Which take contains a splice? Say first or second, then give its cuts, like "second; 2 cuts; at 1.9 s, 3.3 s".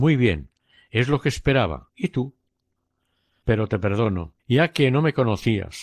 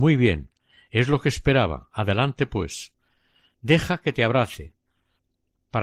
first; 2 cuts; at 1.9 s, 4.4 s